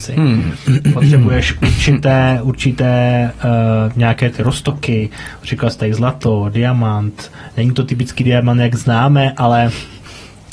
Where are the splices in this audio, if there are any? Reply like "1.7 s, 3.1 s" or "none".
none